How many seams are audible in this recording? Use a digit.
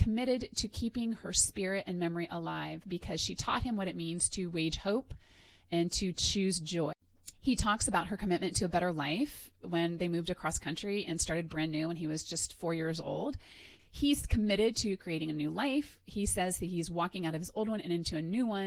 1